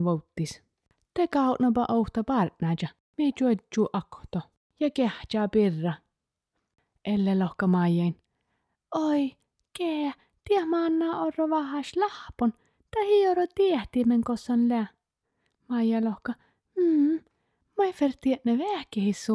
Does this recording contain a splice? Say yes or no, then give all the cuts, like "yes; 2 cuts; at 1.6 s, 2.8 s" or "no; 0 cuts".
no; 0 cuts